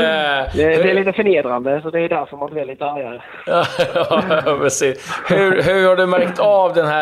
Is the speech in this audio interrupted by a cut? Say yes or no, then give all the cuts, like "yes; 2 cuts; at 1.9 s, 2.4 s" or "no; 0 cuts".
no; 0 cuts